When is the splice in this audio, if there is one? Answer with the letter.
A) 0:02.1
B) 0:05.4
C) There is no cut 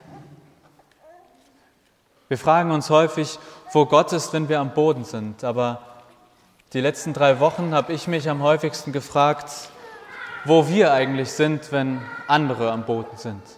C